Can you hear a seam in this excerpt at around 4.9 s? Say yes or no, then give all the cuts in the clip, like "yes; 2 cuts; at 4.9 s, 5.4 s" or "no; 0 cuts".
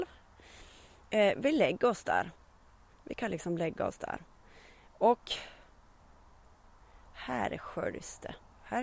no; 1 cut; at 2.9 s